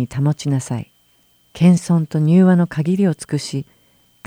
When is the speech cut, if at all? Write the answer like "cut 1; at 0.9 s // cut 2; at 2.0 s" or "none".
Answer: cut 1; at 1.4 s